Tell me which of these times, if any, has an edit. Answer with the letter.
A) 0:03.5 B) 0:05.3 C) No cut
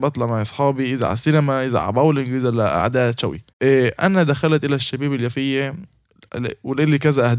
A